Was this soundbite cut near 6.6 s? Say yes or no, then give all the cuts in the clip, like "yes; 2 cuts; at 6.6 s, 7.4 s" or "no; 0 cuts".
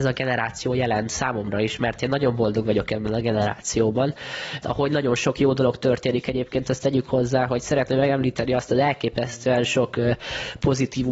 no; 1 cut; at 4.6 s